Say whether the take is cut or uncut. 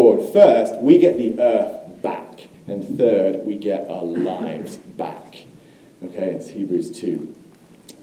cut